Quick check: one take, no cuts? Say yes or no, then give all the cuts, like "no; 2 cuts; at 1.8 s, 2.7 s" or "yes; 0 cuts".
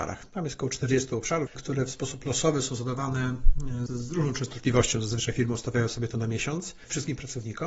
no; 2 cuts; at 1.5 s, 3.9 s